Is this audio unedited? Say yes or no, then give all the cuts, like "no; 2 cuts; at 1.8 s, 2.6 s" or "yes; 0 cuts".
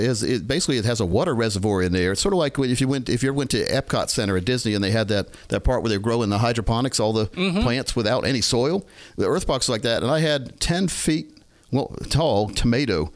yes; 0 cuts